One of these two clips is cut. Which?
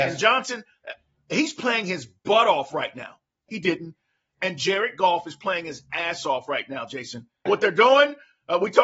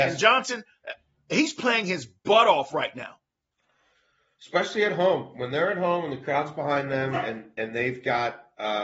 first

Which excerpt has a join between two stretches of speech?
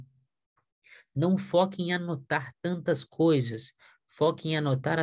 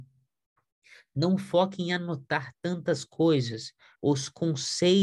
second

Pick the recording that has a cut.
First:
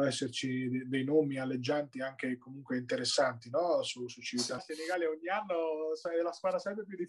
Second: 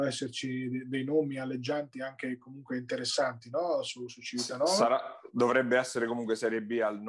first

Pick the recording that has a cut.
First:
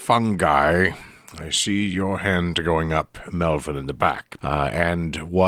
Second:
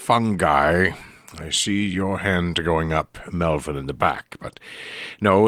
first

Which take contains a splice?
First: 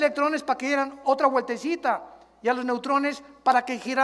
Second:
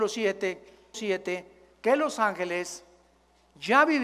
second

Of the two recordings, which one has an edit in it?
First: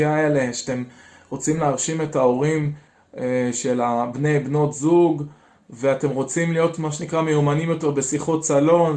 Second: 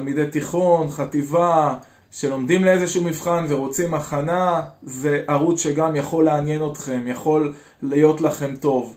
second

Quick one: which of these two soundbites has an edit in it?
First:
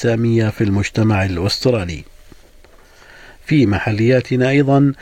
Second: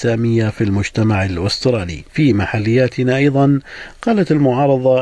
second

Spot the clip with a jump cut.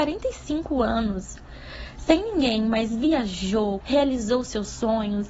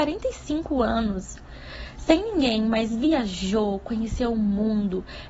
first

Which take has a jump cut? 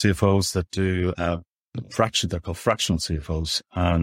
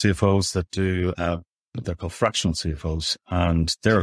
second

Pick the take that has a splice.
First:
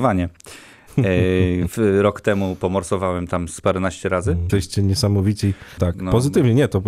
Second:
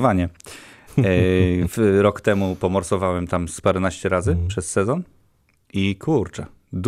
first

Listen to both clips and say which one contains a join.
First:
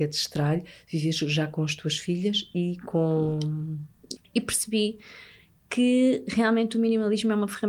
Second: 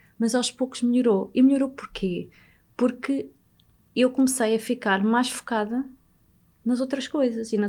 first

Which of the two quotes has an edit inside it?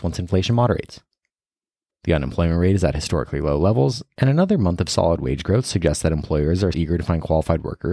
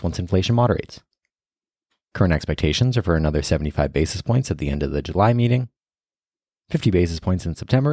first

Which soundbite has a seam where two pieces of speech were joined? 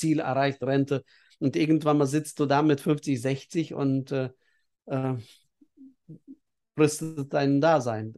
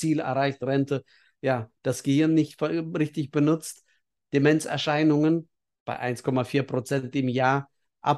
first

